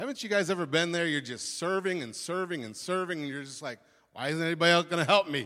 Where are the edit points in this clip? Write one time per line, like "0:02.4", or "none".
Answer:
none

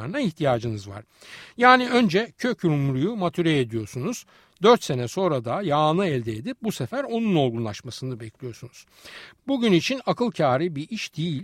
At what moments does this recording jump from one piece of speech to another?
none

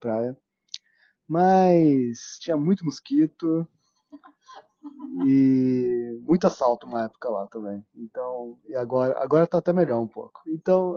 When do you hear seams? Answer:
none

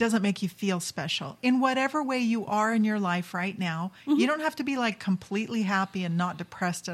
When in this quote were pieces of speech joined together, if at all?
0:01.4

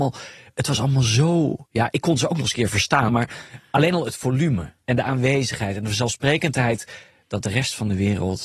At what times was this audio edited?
0:01.7
0:03.1

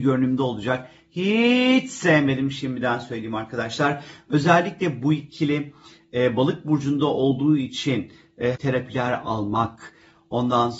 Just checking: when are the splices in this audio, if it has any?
0:04.2
0:08.5

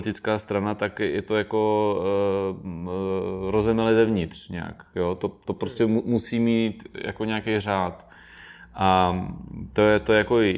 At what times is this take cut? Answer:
none

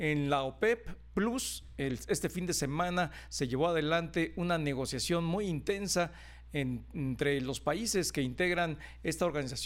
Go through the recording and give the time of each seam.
none

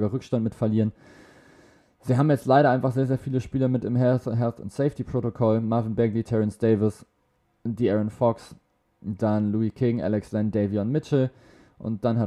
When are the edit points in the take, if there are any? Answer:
none

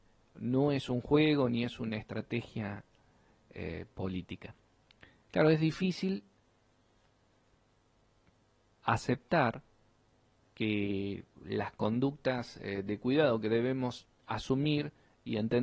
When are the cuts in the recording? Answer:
0:05.2
0:14.2

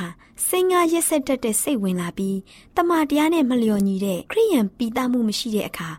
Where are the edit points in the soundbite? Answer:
0:04.3

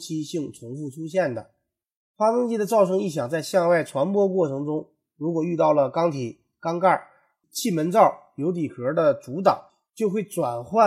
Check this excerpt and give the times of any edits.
0:07.4

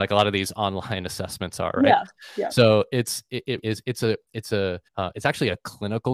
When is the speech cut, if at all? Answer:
0:03.6
0:04.9

